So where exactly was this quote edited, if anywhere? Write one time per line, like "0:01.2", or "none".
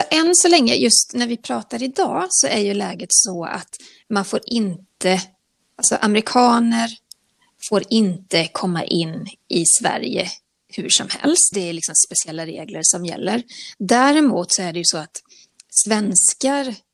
0:11.5